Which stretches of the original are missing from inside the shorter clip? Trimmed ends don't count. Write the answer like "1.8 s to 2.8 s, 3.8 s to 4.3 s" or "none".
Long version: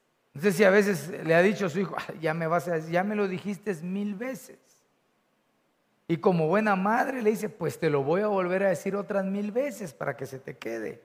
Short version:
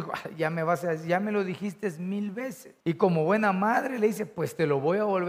4.6 s to 6.0 s

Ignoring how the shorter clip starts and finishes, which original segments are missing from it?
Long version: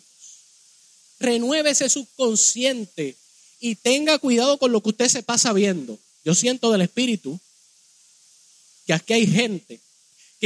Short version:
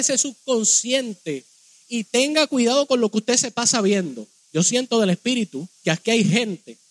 7.5 s to 8.8 s

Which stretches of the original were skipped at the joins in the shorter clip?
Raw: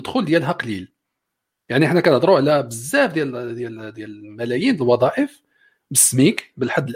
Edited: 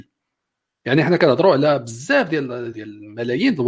3.5 s to 3.9 s

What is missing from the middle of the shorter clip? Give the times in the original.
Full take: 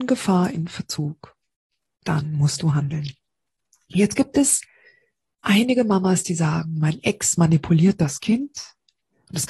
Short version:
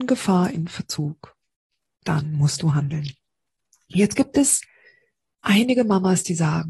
none

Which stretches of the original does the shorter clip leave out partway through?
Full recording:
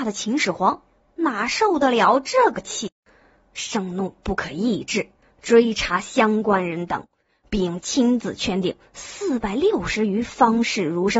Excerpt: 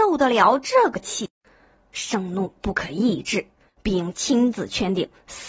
5.3 s to 7.3 s

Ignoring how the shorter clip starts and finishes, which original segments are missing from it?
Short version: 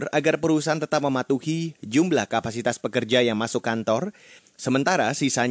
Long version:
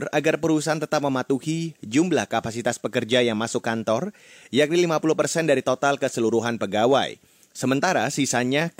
4.4 s to 7.3 s

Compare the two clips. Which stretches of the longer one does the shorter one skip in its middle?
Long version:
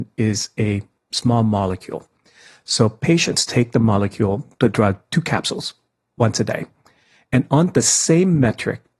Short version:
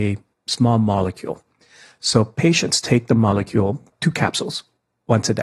4.6 s to 5.0 s

